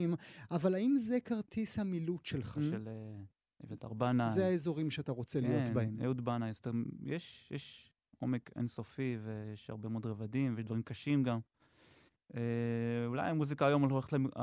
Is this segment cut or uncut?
cut